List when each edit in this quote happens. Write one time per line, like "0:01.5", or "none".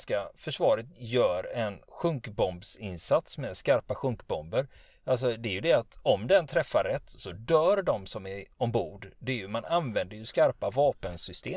none